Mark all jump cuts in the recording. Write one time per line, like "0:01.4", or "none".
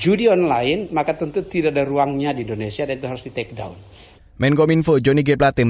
0:04.2